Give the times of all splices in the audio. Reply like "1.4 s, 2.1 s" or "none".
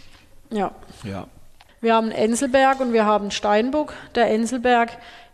1.7 s